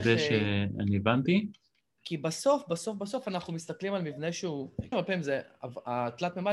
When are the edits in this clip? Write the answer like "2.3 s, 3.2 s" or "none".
2.0 s, 4.9 s